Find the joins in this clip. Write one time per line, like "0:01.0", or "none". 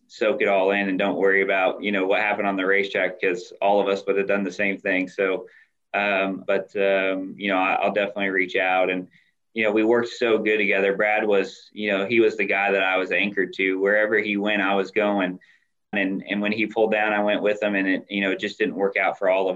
0:06.5
0:15.9